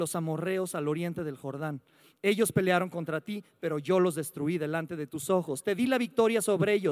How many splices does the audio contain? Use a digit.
0